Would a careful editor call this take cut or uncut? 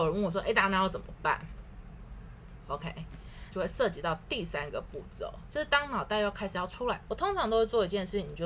cut